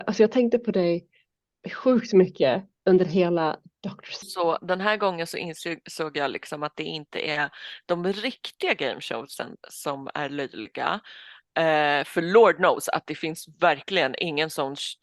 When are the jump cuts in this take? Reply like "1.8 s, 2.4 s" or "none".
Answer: 4.2 s